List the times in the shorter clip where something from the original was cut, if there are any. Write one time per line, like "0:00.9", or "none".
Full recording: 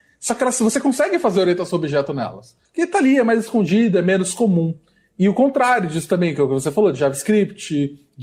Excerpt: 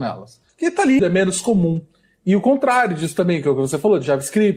0:01.0